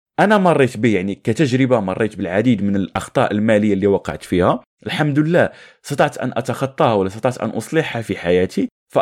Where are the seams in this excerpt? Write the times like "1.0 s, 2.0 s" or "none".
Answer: none

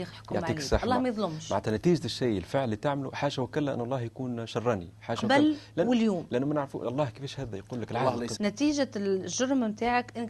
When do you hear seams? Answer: 8.4 s

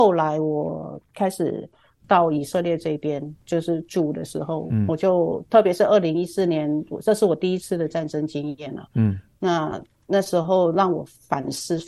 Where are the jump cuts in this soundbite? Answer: 3.4 s

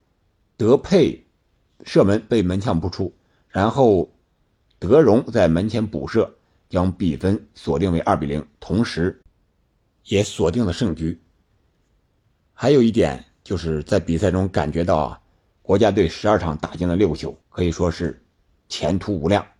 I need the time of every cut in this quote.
15.6 s, 17.4 s

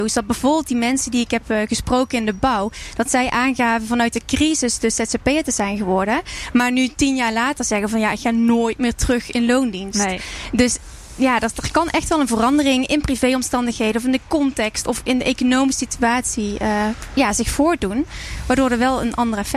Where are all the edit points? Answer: none

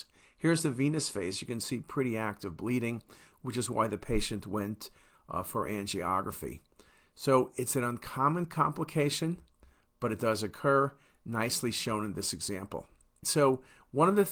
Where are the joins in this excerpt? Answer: 13.2 s

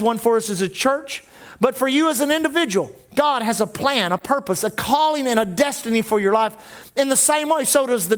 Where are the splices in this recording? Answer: none

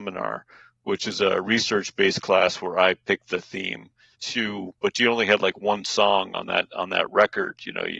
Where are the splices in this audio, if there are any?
4.1 s

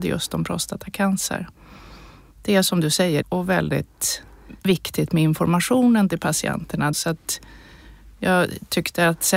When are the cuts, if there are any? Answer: 3.2 s, 6.9 s

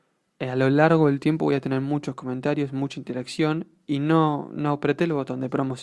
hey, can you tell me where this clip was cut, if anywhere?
none

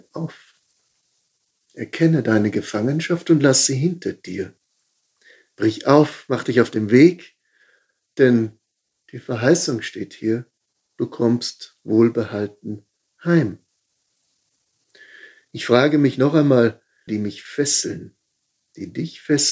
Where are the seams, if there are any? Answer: 17.1 s

